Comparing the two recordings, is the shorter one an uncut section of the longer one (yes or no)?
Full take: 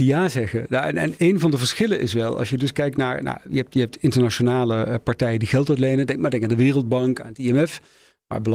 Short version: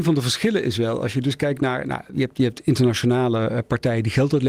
yes